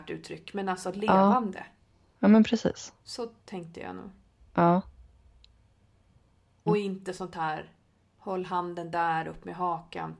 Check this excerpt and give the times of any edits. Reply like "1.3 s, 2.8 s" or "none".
6.7 s